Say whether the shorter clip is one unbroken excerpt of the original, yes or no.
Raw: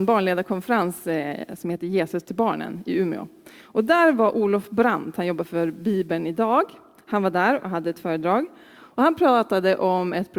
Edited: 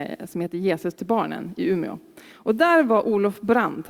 yes